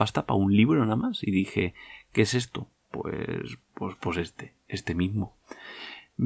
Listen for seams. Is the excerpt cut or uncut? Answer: uncut